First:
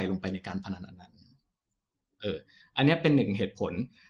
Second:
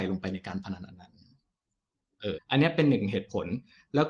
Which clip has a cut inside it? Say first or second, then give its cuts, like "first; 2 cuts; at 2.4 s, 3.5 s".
second; 1 cut; at 2.4 s